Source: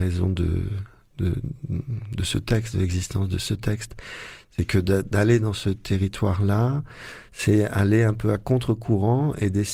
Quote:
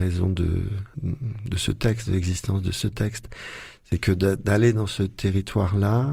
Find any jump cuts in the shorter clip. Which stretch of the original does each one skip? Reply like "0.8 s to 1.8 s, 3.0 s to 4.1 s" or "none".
0.9 s to 1.6 s